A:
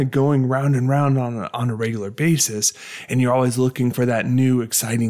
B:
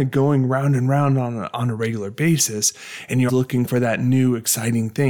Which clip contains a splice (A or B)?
B